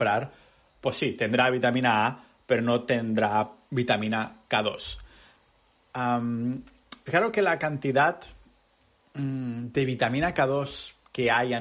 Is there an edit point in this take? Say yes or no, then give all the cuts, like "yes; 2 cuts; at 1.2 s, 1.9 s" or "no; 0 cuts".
yes; 1 cut; at 7.1 s